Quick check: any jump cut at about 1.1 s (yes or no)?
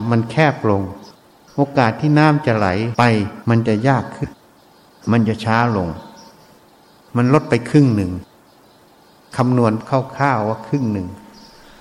no